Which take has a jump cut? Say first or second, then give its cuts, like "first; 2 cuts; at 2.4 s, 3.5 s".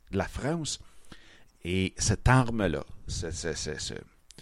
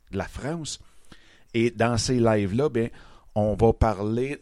first; 1 cut; at 1.5 s